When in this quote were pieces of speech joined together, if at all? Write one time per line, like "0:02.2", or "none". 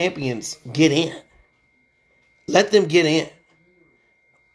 none